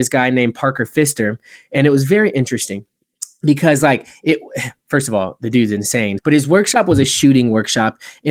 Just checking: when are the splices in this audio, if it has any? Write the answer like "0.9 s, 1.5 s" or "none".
6.2 s